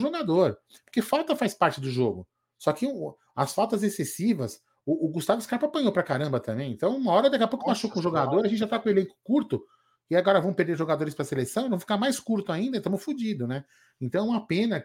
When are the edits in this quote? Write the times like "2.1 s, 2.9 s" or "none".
2.6 s

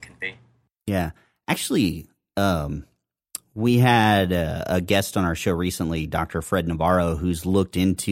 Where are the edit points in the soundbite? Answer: none

